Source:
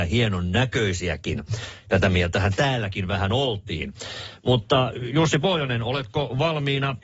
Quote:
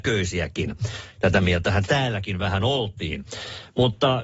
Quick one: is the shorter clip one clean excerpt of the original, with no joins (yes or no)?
yes